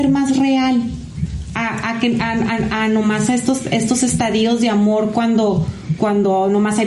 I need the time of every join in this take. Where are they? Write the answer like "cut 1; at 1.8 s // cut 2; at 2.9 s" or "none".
cut 1; at 6.0 s